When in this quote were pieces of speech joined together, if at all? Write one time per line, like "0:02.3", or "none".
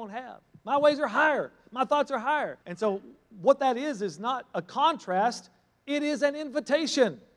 0:02.6